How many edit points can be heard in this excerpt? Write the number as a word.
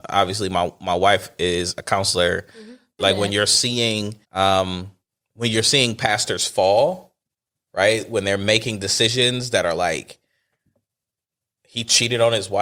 two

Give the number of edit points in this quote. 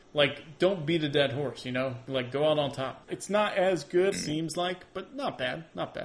two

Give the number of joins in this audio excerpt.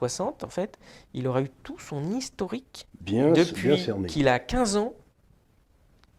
one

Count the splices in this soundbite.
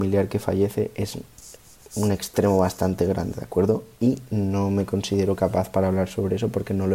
zero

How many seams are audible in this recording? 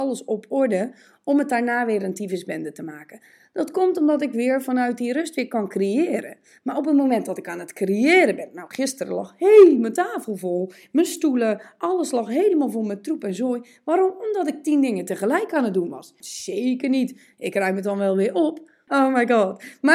two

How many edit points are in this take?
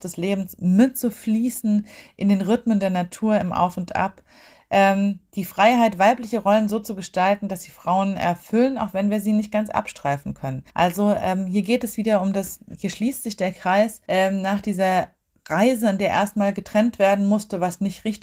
two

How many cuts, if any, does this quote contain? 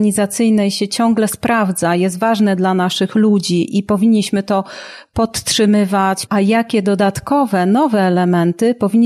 one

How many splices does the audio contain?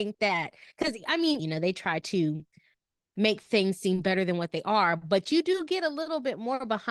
one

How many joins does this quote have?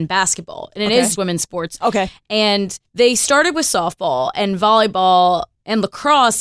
two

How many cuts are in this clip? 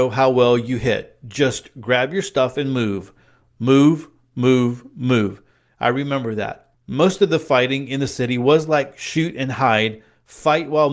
one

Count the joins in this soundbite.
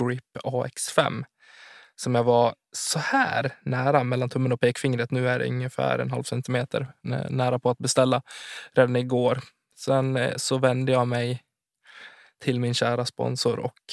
zero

